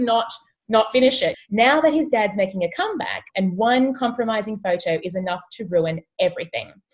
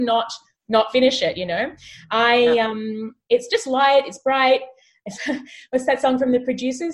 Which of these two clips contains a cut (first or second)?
first